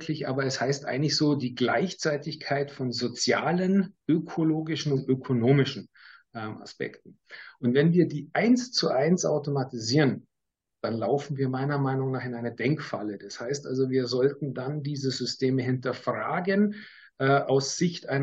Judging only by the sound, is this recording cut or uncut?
cut